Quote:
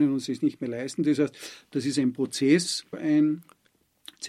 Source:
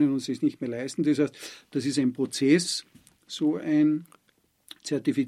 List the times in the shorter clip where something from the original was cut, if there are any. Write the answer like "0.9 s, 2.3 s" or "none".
2.9 s

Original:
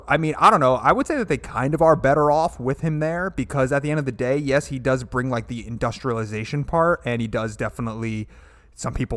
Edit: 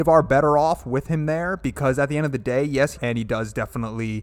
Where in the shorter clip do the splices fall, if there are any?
2.9 s

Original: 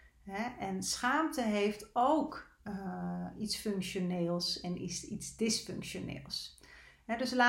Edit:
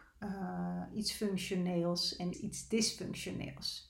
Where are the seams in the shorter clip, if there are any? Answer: 2.3 s

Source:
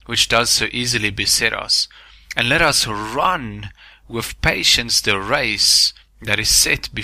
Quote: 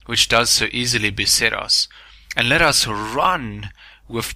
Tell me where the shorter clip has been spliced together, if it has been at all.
none

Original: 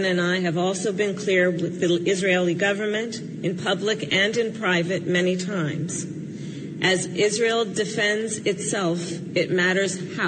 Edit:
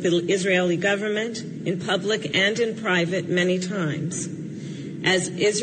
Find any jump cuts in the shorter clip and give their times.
none

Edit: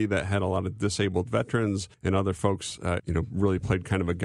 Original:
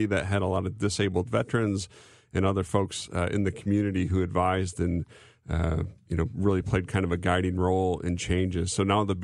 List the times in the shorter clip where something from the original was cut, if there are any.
1.9 s, 3.0 s

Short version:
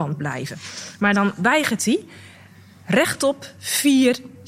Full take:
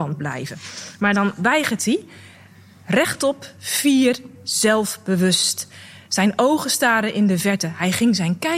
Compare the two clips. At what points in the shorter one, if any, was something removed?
none

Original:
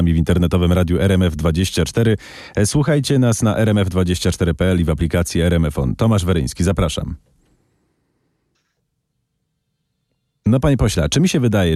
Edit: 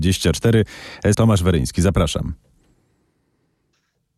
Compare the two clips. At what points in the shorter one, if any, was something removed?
1.1 s

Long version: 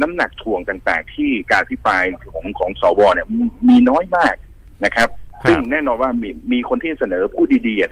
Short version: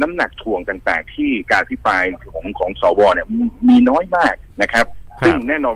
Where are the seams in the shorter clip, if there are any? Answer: 4.5 s

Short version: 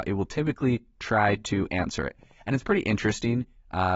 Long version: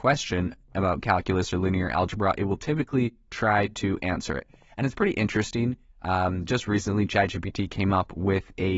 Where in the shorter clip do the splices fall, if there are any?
none

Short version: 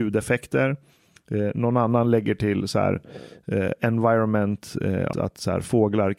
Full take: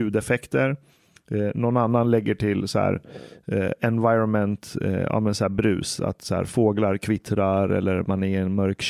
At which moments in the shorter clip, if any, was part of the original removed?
5.1 s

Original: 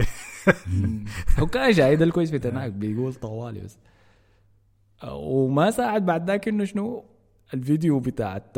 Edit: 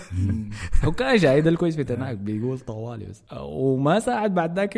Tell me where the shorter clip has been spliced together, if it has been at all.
3.3 s

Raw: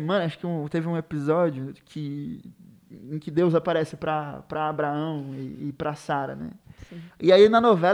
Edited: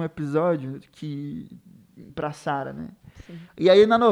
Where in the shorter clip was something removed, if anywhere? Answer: 2.1 s

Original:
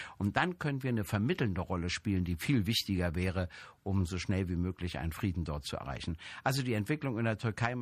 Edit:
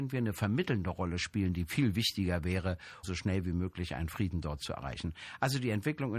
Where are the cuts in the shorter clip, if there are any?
3.0 s

